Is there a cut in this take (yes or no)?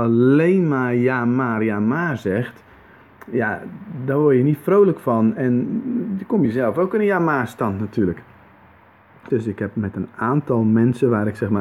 yes